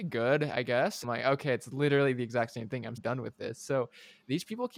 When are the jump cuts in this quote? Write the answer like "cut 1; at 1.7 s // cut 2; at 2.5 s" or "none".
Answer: cut 1; at 1.0 s // cut 2; at 3.0 s